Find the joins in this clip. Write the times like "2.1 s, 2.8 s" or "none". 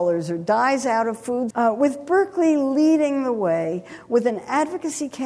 1.5 s